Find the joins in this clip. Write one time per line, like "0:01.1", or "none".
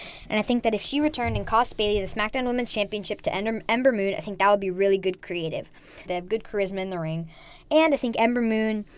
0:06.1